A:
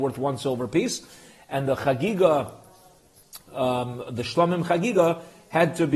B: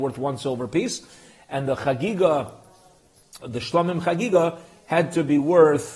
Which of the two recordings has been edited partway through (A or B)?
B